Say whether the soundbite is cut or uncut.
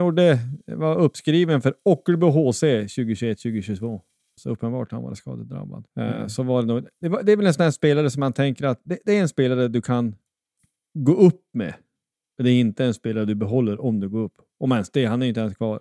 cut